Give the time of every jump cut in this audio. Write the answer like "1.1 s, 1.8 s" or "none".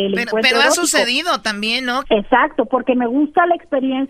2.0 s